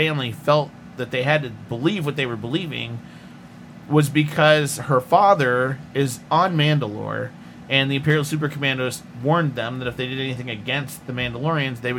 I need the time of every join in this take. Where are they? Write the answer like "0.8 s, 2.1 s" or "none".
none